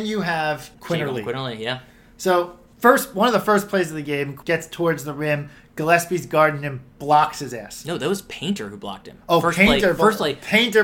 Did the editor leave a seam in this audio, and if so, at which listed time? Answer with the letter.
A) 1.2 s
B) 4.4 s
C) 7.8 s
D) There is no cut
B